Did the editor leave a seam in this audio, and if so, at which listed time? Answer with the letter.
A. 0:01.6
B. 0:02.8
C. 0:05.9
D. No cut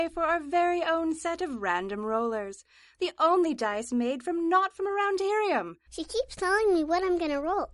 C